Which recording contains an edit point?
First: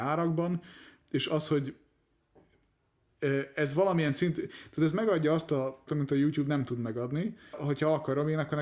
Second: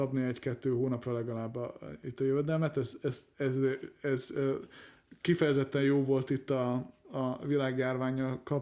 first; 2 cuts; at 5.9 s, 7.5 s

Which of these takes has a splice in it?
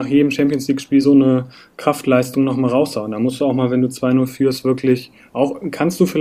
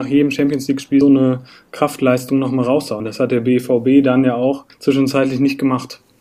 second; 3 cuts; at 1.0 s, 3.0 s, 4.7 s

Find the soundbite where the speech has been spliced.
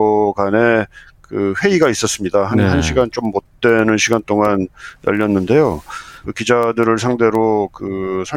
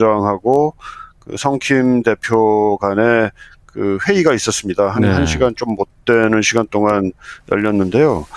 first; 1 cut; at 6.2 s

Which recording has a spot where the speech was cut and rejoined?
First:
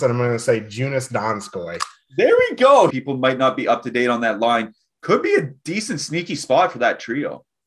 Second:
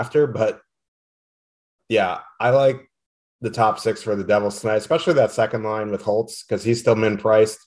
first; 1 cut; at 2.9 s

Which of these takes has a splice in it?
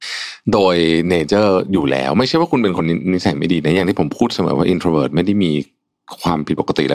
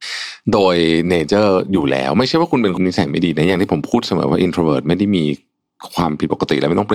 second; 1 cut; at 2.8 s

